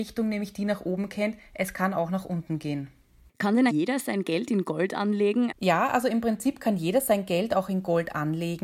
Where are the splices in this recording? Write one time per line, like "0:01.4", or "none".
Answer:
0:03.7
0:05.5